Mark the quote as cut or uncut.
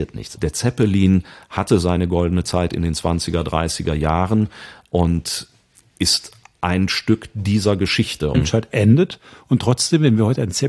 cut